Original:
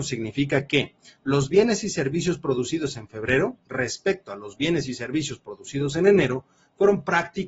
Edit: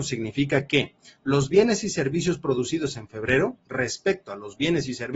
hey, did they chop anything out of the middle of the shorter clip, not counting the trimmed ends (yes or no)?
no